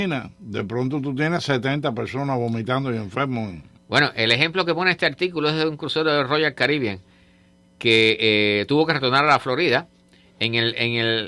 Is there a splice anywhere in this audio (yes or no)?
no